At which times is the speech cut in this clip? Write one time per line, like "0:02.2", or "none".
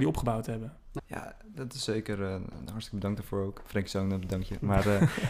0:01.0

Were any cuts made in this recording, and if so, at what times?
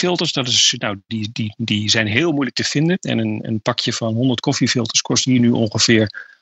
none

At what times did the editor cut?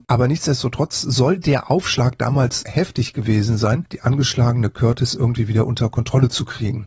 0:02.6
0:03.9

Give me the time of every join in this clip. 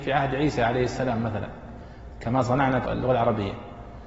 0:02.8

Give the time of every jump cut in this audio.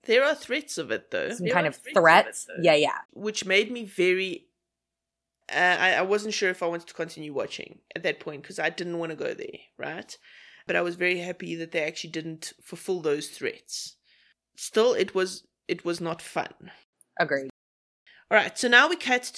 0:03.1

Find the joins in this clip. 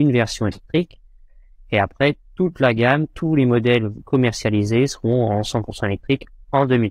none

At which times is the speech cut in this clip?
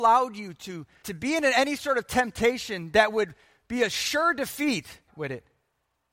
0:01.0
0:05.1

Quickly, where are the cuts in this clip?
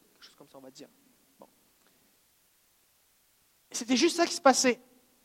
0:03.6

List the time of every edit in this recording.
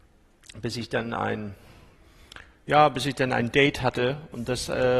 none

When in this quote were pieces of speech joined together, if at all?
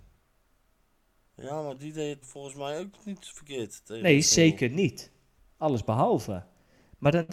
0:02.2

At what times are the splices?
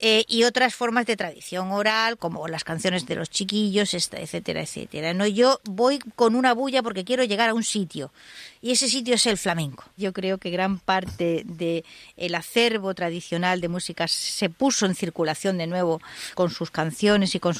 0:02.2
0:10.0
0:16.3

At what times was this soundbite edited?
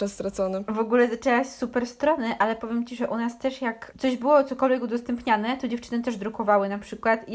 none

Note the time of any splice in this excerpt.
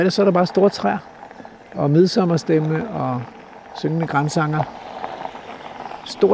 none

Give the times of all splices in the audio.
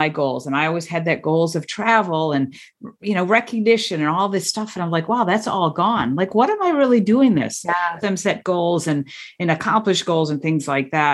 0:08.0

